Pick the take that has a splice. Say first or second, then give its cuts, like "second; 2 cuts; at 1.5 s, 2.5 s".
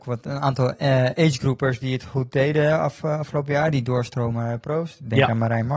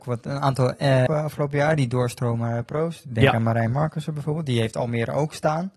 second; 1 cut; at 1.1 s